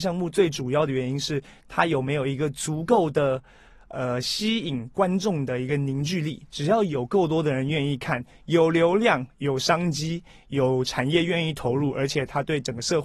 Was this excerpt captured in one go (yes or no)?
yes